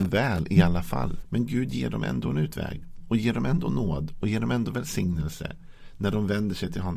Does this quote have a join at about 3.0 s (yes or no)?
no